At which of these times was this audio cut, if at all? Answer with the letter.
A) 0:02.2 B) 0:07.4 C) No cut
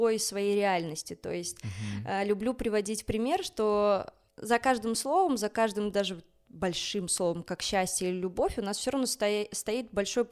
C